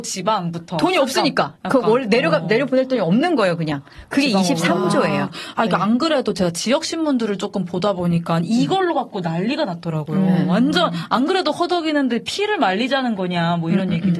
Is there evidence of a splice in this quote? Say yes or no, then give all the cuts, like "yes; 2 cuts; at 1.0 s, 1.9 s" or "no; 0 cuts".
no; 0 cuts